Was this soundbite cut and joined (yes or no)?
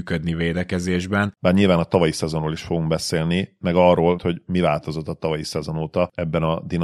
yes